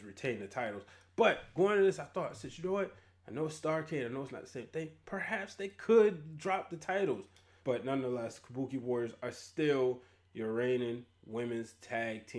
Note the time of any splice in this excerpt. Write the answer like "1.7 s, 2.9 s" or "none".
7.6 s